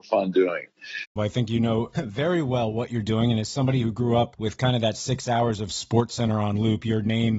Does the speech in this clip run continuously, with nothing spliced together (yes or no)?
no